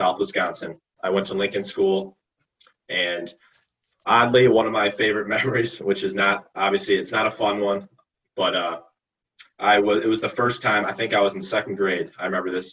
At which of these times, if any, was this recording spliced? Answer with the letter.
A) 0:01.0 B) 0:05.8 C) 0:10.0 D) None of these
A